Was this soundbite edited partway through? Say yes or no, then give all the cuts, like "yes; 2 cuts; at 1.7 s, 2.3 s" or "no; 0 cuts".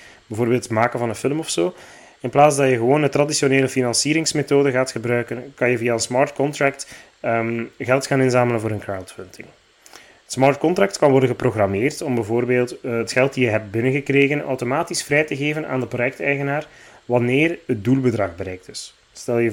no; 0 cuts